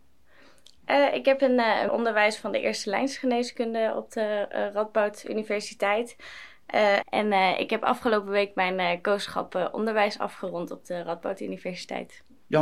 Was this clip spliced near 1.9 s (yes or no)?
yes